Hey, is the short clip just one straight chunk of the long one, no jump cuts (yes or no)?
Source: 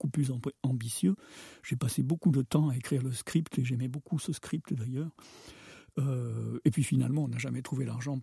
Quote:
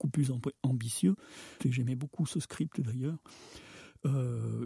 no